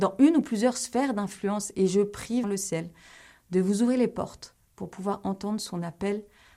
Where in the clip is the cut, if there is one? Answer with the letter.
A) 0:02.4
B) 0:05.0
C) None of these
A